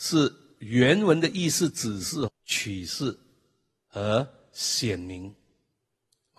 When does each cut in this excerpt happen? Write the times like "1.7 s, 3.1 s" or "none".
2.3 s